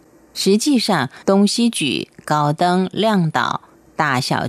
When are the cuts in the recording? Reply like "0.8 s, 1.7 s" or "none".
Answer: 1.2 s